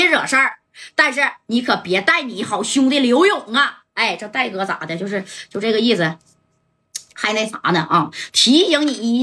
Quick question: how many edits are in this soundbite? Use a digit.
0